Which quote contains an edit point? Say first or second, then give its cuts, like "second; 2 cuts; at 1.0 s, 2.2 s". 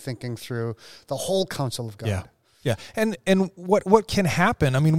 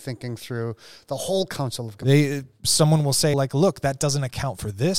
second; 2 cuts; at 2.0 s, 3.3 s